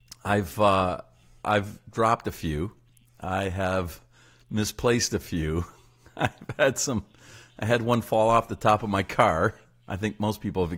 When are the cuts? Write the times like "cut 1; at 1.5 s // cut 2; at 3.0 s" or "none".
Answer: none